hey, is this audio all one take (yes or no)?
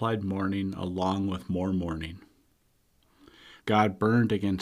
no